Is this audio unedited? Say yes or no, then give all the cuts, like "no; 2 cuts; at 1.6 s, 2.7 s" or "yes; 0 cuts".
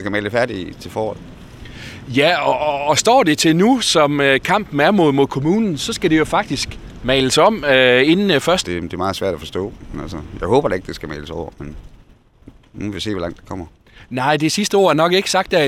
no; 1 cut; at 8.6 s